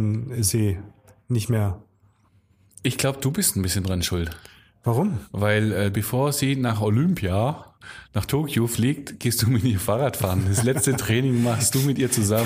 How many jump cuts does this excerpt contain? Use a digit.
1